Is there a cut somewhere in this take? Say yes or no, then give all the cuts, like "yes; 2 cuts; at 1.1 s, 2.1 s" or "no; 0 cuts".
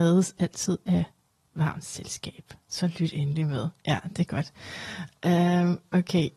yes; 1 cut; at 2.6 s